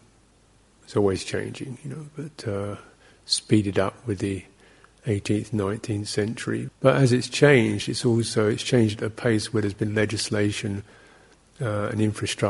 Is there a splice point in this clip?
yes; 1 cut; at 6.7 s

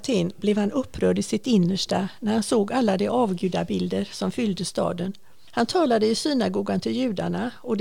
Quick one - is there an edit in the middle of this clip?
no; 0 cuts

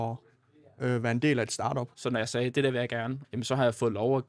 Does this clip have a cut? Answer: yes; 2 cuts; at 1.9 s, 3.2 s

